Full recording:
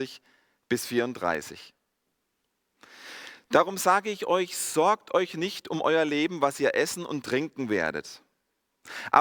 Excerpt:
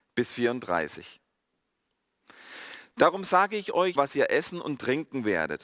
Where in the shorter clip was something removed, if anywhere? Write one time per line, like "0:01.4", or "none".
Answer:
0:04.0